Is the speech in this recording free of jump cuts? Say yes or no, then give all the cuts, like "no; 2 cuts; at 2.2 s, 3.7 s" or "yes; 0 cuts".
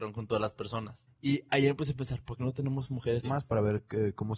no; 2 cuts; at 1.1 s, 3.2 s